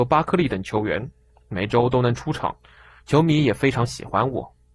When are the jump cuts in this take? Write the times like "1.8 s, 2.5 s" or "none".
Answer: 1.3 s